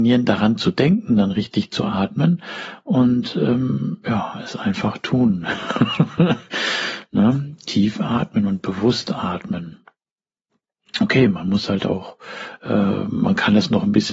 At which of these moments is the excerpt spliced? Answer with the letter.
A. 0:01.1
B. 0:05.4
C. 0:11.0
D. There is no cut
D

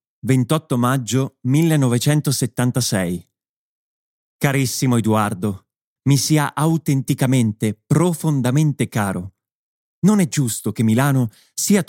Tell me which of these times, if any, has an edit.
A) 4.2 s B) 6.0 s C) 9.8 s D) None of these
B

